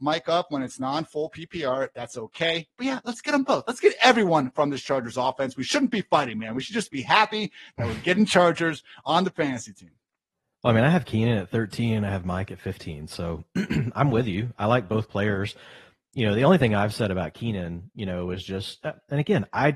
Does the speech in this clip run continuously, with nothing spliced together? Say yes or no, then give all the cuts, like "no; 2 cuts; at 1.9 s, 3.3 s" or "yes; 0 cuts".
yes; 0 cuts